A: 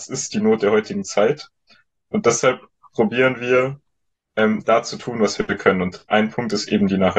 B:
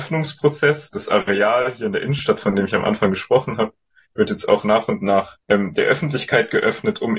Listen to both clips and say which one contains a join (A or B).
B